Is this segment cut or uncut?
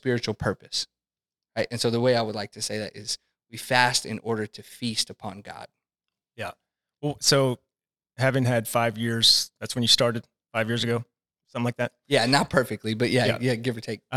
uncut